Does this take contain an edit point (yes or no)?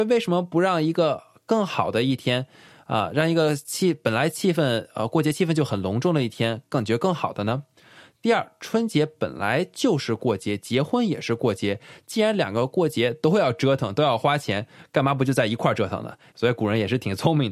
yes